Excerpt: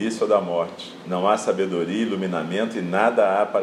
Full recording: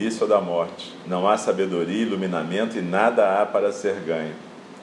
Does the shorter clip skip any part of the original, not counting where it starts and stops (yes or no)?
no